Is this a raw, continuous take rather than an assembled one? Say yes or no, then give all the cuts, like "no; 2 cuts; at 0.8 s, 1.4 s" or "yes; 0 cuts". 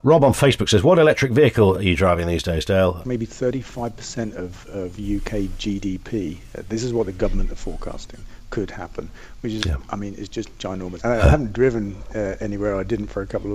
no; 2 cuts; at 3.0 s, 11.0 s